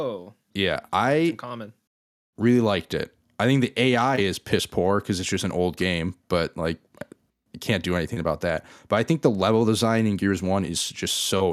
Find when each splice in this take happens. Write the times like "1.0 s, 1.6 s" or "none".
none